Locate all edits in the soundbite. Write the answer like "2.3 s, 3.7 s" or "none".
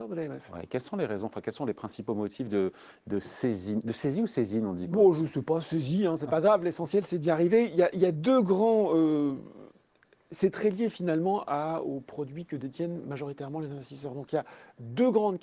none